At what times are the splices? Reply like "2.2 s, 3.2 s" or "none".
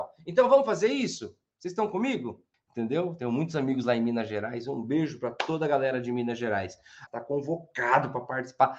2.5 s, 7.1 s